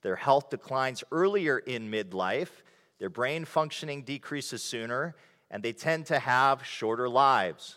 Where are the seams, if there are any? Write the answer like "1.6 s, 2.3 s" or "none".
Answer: none